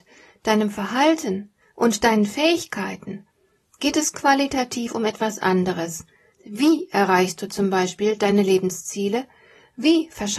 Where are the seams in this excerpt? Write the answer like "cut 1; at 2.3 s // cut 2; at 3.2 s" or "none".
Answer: cut 1; at 6.3 s